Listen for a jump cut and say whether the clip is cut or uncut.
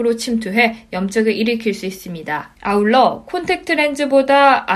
cut